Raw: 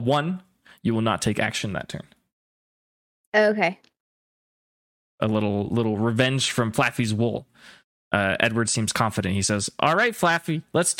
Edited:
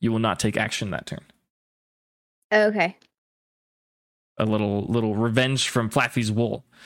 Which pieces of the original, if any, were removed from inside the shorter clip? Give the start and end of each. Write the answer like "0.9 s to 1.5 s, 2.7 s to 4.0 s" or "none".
none